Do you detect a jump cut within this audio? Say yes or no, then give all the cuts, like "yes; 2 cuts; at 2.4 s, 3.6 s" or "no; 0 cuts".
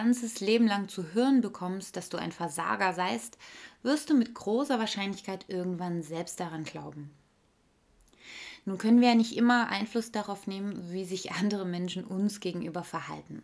no; 0 cuts